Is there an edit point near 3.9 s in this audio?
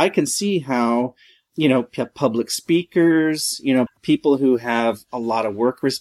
yes; 1 cut; at 3.9 s

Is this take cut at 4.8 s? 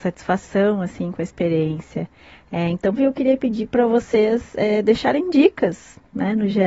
no; 1 cut; at 3.0 s

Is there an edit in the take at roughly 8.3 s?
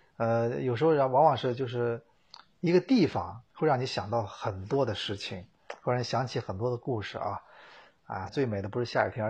yes; 1 cut; at 8.3 s

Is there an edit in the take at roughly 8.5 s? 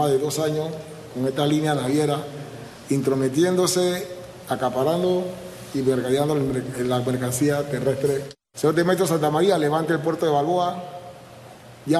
yes; 1 cut; at 8.5 s

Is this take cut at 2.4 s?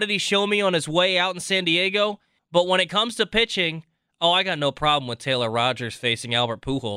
yes; 1 cut; at 2.4 s

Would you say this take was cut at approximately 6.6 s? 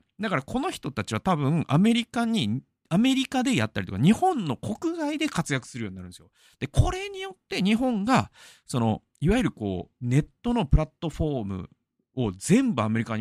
yes; 1 cut; at 6.6 s

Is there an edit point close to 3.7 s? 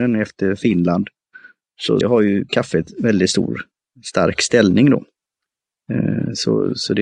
no; 1 cut; at 2.0 s

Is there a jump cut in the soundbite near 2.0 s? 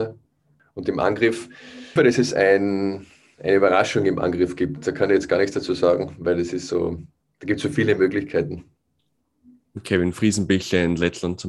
yes; 1 cut; at 2.0 s

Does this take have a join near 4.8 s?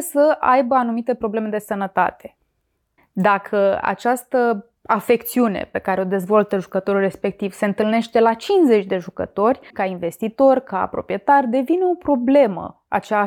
yes; 3 cuts; at 3.0 s, 4.8 s, 9.7 s

